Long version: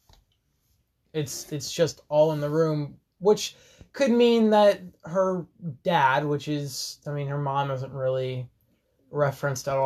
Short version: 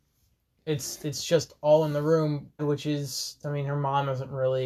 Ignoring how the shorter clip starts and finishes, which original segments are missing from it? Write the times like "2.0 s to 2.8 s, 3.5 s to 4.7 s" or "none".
3.1 s to 6.2 s